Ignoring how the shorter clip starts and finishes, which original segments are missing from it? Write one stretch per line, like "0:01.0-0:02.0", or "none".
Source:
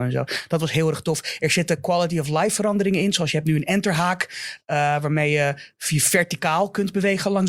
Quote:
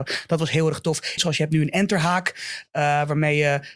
0:01.4-0:03.1